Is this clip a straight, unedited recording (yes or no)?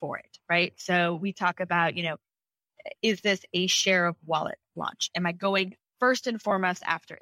yes